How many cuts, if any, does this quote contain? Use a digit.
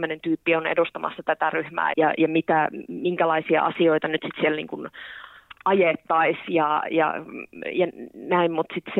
1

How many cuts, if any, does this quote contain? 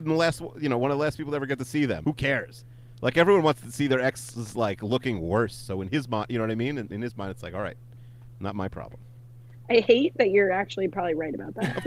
1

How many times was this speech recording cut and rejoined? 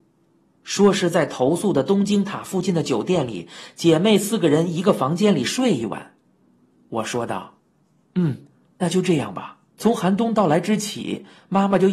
1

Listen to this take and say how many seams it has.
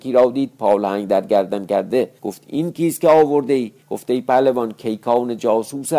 2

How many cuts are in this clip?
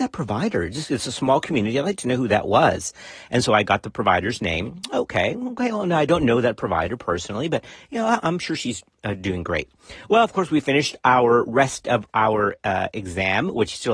0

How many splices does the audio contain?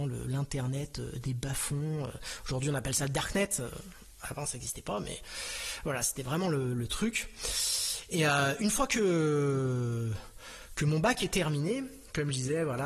0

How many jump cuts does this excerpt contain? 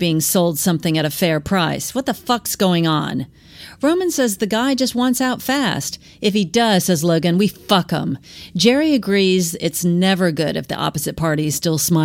0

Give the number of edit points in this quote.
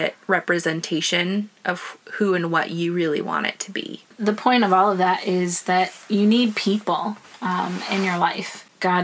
0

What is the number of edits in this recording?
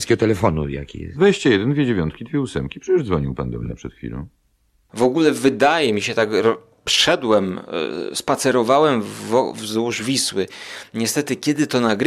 0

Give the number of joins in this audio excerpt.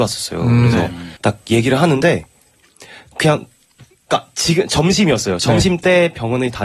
1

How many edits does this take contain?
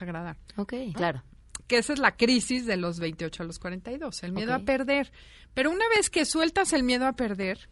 1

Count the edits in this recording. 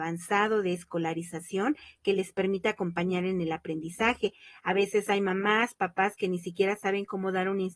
0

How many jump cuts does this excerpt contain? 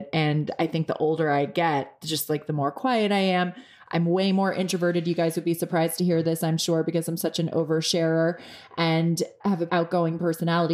1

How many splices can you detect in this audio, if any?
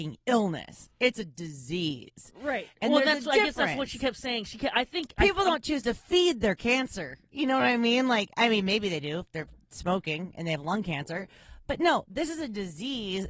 0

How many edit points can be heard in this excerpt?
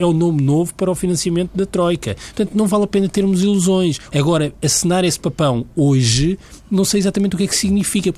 1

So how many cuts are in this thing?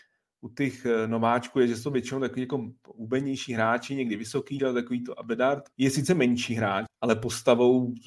3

